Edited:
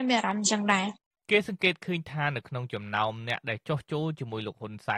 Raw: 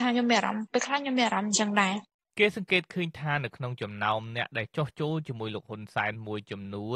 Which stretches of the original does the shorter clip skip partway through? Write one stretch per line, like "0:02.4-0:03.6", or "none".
none